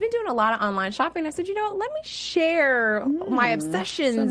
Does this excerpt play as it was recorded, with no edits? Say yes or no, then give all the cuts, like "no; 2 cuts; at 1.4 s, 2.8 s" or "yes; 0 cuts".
yes; 0 cuts